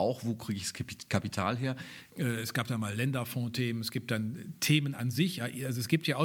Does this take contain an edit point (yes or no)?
yes